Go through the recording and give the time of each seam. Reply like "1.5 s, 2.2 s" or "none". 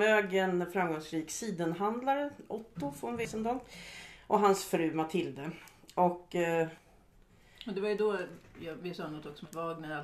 none